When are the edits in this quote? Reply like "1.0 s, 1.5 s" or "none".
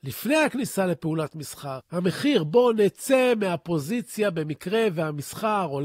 1.8 s